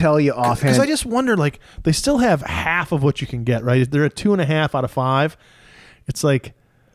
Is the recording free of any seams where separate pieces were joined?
yes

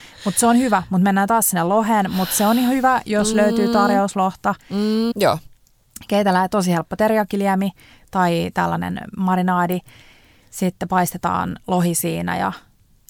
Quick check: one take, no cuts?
no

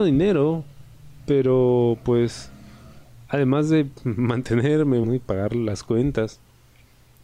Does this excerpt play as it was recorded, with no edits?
no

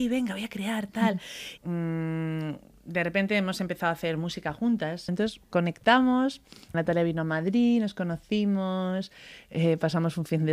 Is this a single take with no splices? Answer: no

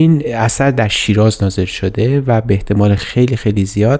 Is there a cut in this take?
no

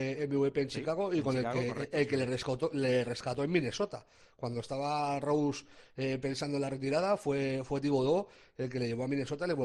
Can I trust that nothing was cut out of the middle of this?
yes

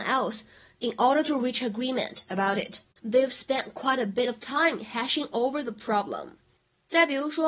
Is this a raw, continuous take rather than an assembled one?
no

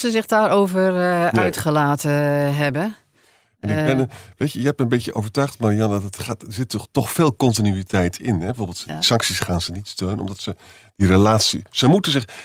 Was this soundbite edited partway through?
no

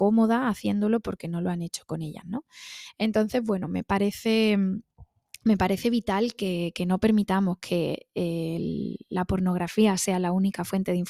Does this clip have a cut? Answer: no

